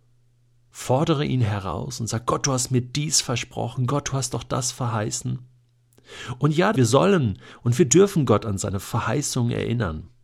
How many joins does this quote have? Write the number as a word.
one